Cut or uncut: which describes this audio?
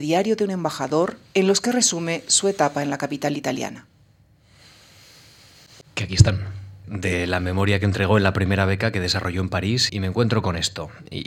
cut